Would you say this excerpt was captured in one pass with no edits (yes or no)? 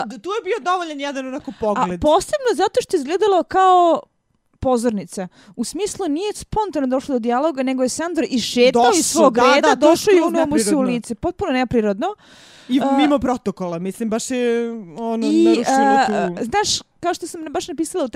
yes